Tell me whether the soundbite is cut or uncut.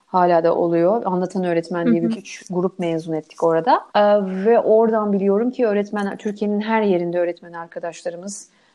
cut